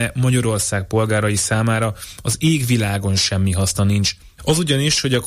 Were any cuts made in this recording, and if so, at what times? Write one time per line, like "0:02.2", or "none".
0:04.4